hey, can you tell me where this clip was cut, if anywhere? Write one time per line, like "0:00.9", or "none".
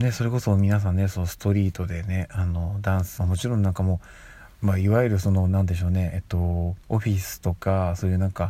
0:03.2
0:06.8